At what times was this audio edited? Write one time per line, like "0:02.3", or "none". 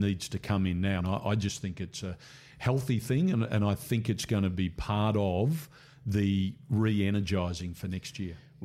0:01.0